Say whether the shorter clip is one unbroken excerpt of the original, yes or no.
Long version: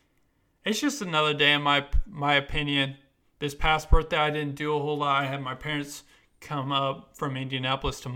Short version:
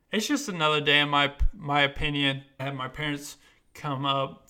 no